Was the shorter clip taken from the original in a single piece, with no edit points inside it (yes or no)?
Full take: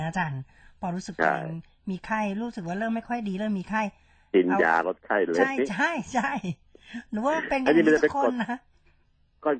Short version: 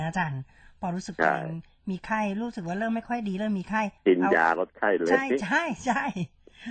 no